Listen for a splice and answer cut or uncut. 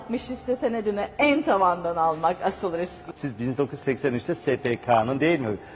cut